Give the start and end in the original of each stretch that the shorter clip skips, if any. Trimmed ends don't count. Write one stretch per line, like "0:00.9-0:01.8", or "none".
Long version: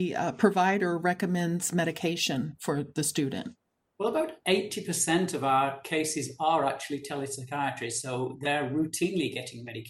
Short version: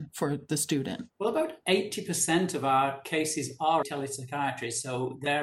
0:03.6-0:03.9
0:06.6-0:07.0